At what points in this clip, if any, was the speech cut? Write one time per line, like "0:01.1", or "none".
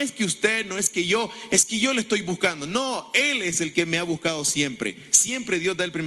none